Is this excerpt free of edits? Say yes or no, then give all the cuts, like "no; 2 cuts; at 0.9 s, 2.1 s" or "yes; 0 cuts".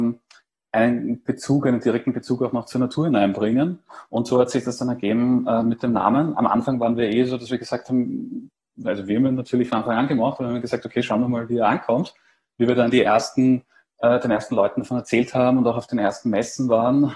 yes; 0 cuts